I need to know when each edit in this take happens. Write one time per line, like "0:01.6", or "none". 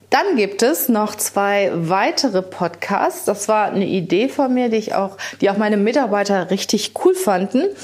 none